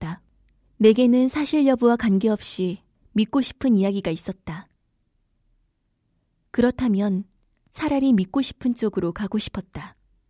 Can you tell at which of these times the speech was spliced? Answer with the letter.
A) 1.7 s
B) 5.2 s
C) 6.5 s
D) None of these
D